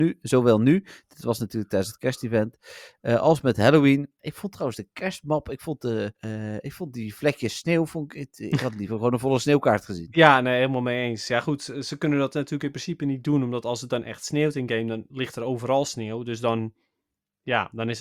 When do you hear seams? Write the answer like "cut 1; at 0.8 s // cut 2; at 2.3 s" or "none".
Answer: cut 1; at 4.2 s // cut 2; at 6.2 s

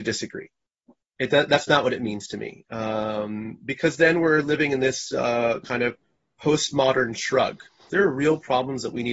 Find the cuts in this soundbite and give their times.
cut 1; at 7.9 s

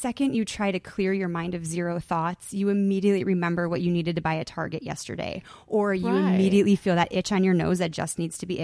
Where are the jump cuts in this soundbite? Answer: none

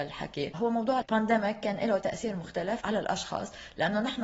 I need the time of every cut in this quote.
cut 1; at 1.0 s

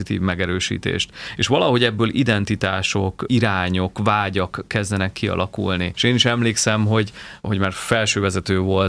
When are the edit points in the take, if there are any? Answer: cut 1; at 3.3 s // cut 2; at 5.9 s

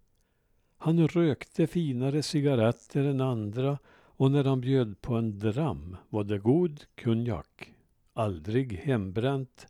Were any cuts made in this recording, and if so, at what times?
none

